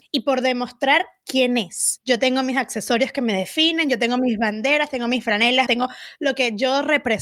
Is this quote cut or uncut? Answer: cut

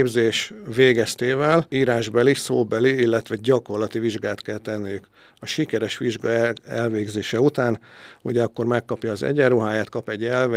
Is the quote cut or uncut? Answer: uncut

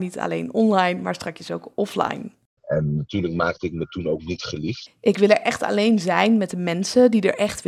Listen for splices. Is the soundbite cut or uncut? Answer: cut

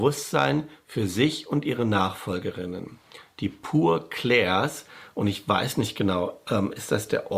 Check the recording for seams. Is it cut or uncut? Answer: uncut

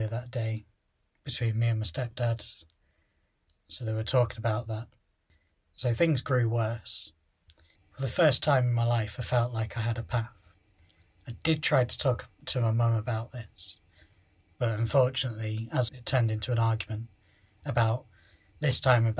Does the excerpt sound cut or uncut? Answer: cut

